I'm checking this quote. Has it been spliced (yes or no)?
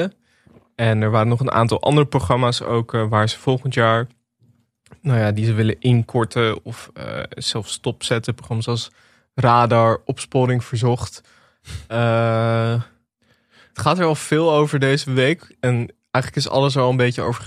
no